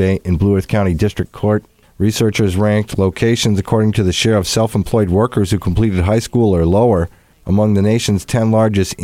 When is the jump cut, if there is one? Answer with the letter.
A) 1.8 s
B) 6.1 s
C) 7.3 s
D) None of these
A